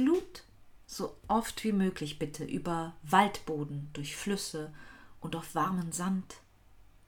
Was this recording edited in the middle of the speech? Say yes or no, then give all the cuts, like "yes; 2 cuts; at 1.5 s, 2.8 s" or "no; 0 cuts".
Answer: no; 0 cuts